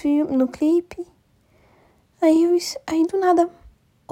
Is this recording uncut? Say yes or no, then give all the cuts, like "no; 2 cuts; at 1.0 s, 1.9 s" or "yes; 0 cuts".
yes; 0 cuts